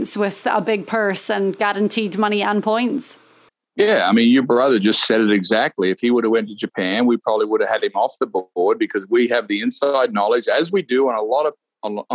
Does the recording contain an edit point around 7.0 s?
no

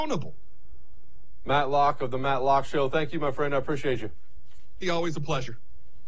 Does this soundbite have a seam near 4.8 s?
yes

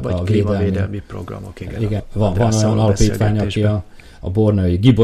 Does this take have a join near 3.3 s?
no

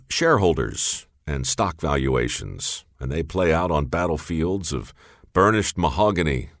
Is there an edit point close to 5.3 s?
no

